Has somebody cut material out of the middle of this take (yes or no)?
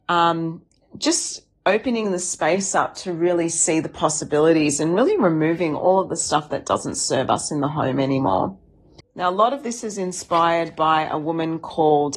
yes